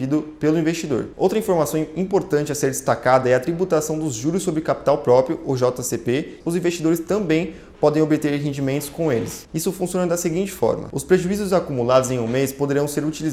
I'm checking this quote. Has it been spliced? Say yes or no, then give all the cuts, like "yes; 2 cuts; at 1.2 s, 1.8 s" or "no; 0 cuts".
yes; 2 cuts; at 6.4 s, 9.5 s